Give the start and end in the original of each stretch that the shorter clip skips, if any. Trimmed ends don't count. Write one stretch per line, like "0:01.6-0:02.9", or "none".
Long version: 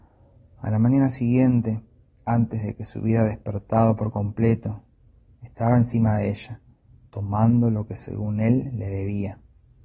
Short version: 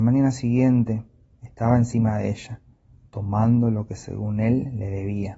0:02.1-0:05.3